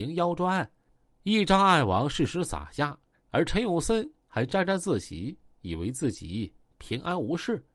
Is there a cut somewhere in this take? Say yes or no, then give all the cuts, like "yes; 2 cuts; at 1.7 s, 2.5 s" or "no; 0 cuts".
no; 0 cuts